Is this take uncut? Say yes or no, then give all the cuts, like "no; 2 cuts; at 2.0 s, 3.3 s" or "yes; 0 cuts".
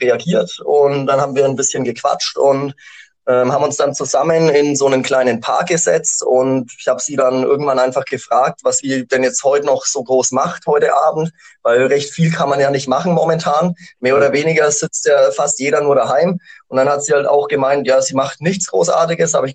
yes; 0 cuts